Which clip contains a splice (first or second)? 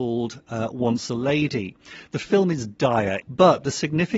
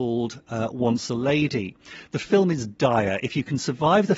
first